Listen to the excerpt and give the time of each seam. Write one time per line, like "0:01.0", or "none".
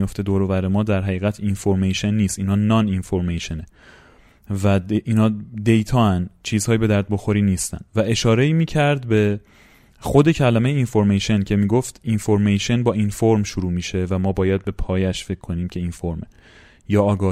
none